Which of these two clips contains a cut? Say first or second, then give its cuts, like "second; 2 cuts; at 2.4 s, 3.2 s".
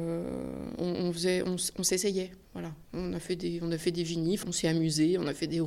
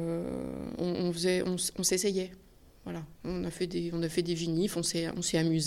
first; 2 cuts; at 2.4 s, 4.4 s